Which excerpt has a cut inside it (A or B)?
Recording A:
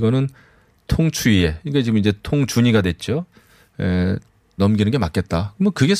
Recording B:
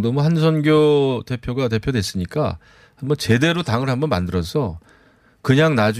A